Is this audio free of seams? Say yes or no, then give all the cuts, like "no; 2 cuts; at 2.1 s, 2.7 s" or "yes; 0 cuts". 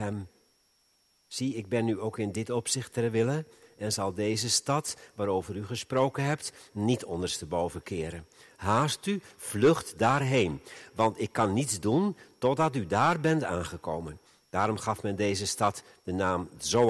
yes; 0 cuts